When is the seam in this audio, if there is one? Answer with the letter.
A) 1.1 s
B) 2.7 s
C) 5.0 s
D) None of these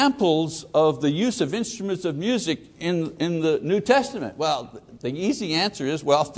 D